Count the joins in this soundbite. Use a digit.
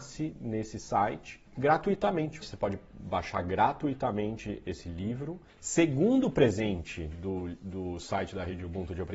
1